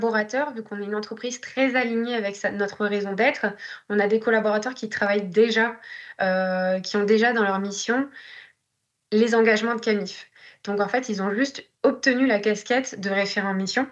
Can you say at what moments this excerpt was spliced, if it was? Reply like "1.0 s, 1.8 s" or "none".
none